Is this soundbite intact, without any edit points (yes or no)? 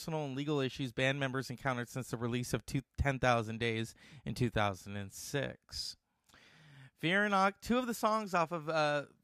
yes